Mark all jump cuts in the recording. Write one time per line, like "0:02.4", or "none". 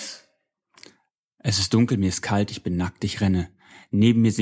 none